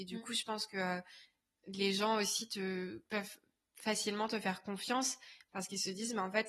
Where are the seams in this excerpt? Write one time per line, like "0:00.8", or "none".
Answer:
none